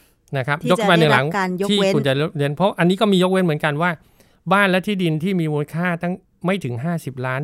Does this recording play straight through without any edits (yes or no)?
yes